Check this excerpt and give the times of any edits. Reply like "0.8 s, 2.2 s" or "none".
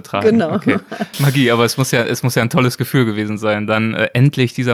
1.1 s